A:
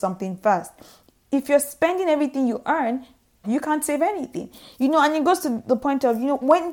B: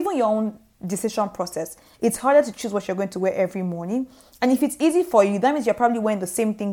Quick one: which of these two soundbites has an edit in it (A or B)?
A